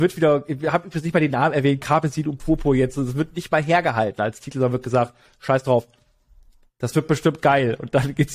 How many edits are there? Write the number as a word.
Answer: zero